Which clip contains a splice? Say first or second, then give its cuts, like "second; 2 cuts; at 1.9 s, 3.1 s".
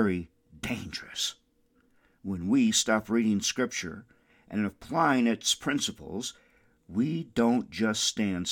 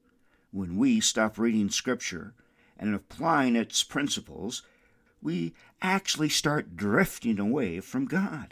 second; 1 cut; at 5.1 s